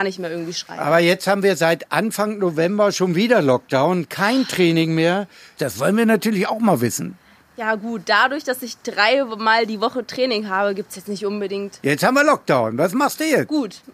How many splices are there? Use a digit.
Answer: 1